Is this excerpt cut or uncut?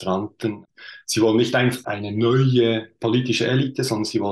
uncut